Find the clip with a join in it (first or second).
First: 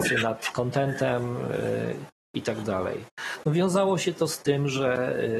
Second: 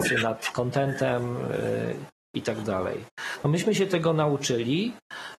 first